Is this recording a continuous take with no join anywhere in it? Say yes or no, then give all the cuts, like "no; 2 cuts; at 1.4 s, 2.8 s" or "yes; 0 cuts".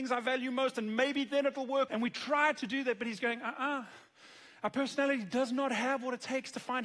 no; 1 cut; at 1.9 s